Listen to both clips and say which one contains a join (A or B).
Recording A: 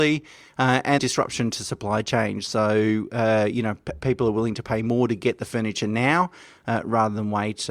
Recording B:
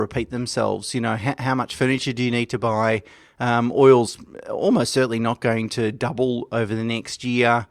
A